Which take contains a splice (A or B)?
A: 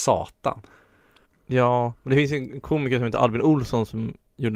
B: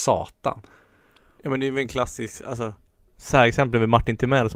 A